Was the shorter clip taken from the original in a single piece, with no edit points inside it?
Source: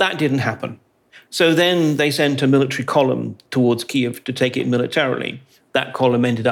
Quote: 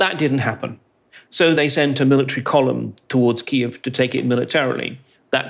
no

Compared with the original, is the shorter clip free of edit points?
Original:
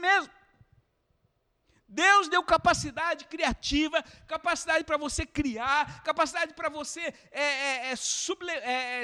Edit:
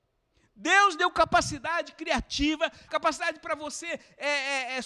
no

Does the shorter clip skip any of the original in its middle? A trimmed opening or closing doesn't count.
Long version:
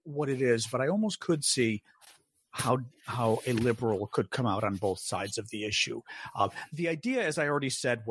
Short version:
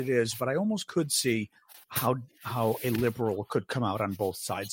yes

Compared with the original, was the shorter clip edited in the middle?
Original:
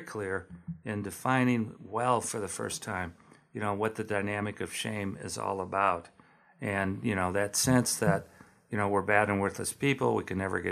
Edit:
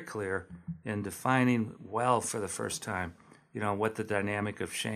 no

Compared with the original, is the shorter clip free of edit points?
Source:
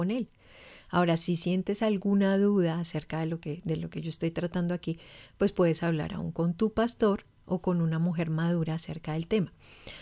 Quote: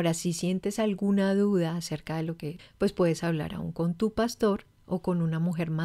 no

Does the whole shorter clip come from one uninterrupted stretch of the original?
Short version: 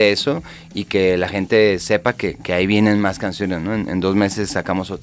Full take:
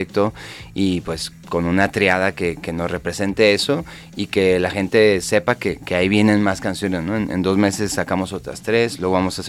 yes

